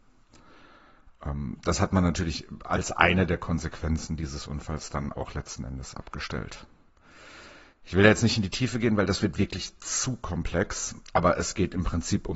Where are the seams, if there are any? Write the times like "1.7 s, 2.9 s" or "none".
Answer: 7.7 s